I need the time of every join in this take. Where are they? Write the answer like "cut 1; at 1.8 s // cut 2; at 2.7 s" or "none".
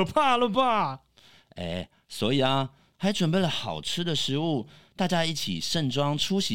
cut 1; at 2.9 s